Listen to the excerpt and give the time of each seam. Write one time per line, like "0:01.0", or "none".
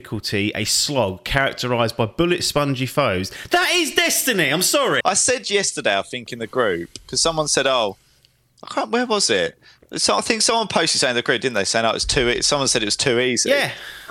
0:05.0